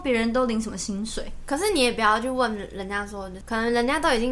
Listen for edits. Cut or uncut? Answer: uncut